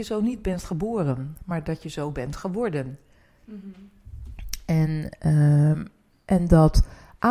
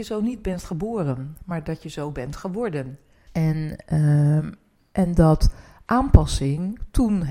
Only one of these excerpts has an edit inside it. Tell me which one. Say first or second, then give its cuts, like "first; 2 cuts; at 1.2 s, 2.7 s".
second; 1 cut; at 3.3 s